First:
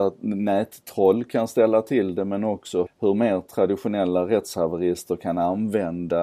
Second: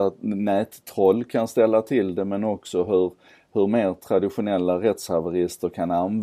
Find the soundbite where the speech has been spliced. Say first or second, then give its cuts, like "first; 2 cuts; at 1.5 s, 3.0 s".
first; 1 cut; at 2.9 s